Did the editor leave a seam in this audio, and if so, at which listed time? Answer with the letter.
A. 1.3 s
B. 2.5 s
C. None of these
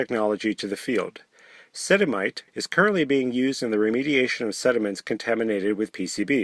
B